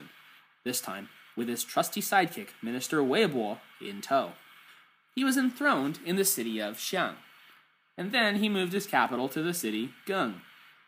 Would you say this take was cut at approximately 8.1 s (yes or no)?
no